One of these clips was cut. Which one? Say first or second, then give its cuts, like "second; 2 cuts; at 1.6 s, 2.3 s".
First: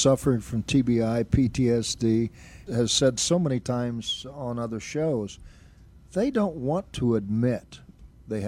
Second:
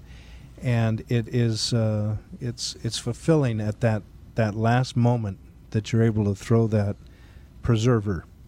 first; 1 cut; at 2.7 s